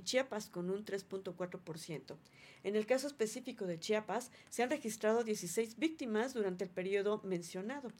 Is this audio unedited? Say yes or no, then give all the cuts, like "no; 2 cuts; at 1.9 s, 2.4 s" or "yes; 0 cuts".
yes; 0 cuts